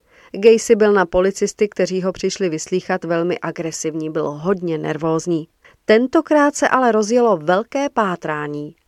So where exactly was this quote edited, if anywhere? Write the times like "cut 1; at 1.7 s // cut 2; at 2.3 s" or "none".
cut 1; at 5.6 s